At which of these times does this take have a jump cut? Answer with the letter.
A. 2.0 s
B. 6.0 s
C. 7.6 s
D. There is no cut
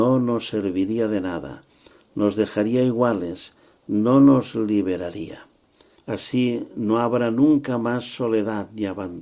B